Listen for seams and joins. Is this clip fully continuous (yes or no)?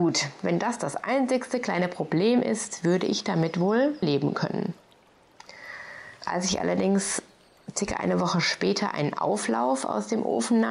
no